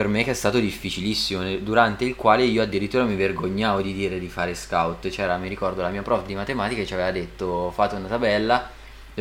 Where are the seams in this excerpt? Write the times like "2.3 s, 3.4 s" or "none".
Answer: none